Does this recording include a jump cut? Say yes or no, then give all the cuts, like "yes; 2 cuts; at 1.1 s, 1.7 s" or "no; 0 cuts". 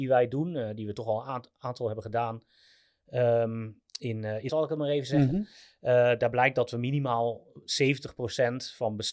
yes; 1 cut; at 4.5 s